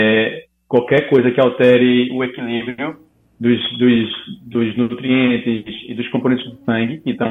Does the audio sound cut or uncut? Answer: uncut